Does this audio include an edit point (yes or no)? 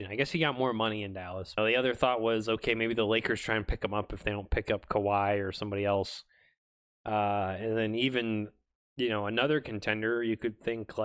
yes